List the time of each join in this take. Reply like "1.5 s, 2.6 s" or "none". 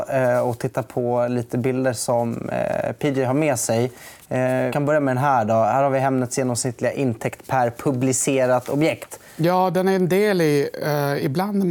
4.7 s